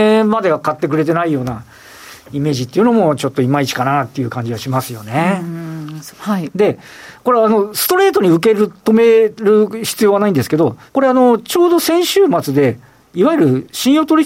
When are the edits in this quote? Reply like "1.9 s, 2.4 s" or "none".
6.1 s, 10.9 s